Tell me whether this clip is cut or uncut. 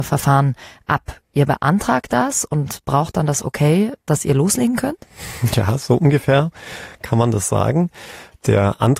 uncut